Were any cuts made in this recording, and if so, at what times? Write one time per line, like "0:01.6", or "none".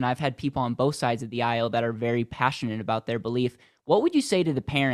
none